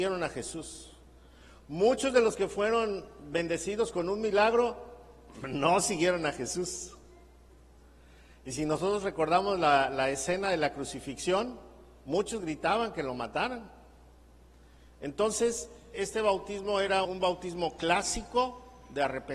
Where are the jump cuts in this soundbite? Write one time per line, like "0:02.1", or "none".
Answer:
0:15.9
0:17.0